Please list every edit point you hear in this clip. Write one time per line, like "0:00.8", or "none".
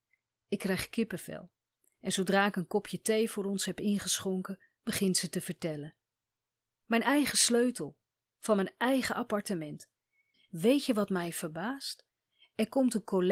0:10.3

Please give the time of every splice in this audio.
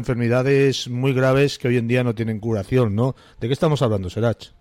none

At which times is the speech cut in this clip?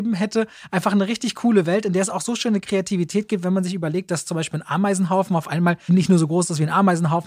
0:05.9

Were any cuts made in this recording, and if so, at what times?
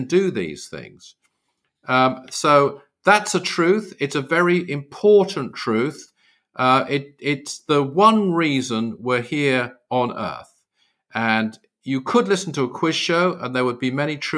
none

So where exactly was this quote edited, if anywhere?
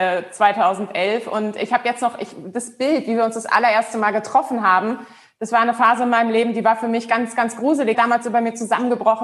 0:07.9

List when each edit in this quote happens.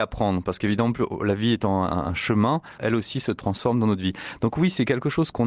0:02.8

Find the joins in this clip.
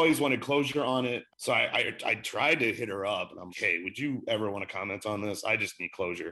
0:01.3
0:03.5

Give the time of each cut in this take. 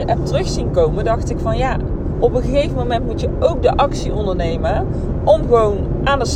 none

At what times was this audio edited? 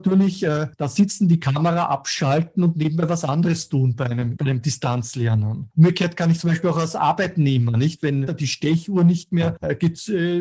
0:04.4
0:08.3

